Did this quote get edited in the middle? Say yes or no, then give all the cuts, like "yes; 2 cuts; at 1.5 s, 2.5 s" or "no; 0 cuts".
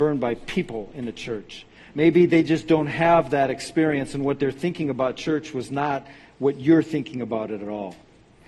no; 0 cuts